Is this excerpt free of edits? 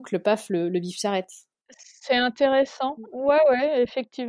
yes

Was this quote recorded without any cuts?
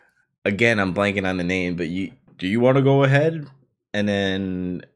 no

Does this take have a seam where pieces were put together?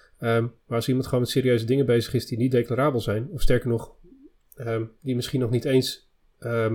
no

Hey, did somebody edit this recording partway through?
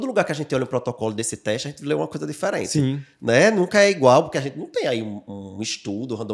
no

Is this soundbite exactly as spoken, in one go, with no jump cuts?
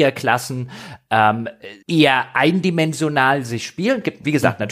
no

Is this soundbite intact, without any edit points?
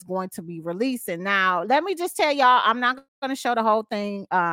no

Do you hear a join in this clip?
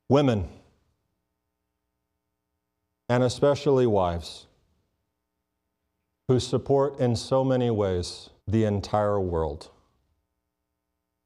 yes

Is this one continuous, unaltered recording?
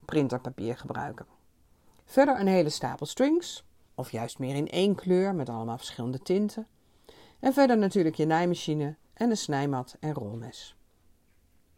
no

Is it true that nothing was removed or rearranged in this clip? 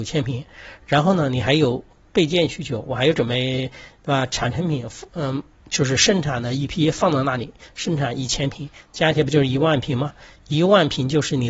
yes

